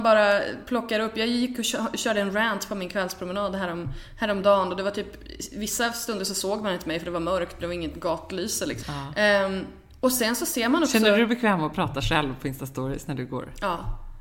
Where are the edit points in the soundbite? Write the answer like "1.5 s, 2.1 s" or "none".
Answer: 8.8 s